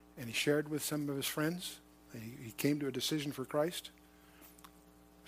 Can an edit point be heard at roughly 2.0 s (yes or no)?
no